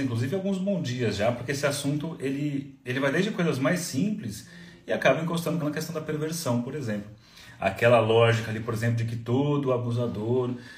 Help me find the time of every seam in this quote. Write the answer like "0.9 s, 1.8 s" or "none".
5.6 s